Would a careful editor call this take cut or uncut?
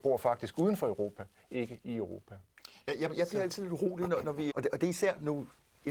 cut